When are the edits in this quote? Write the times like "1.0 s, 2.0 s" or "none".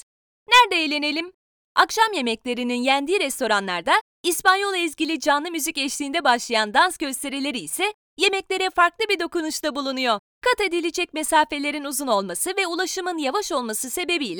1.6 s